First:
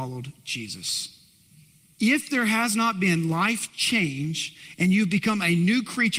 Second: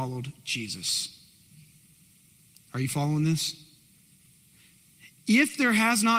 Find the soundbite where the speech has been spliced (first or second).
first